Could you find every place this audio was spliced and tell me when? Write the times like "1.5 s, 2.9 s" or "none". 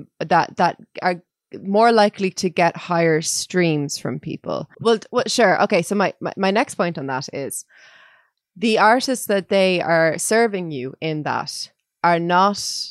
4.7 s